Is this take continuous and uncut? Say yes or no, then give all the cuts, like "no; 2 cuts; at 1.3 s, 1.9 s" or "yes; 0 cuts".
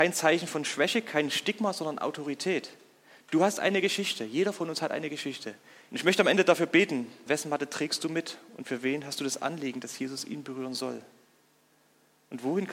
no; 2 cuts; at 5.9 s, 7.3 s